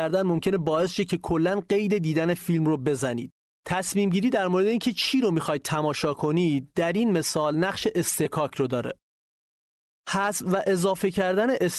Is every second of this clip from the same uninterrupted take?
yes; 0 cuts

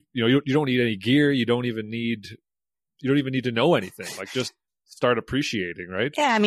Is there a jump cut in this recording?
no; 0 cuts

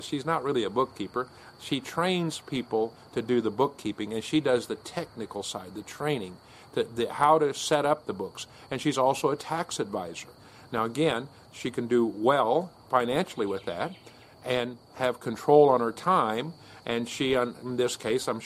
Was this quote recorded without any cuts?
yes; 0 cuts

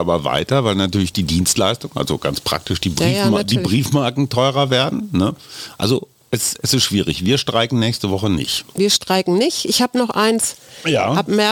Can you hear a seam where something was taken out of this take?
no; 0 cuts

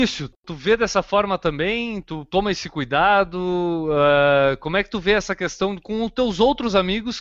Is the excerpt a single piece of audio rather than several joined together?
yes; 0 cuts

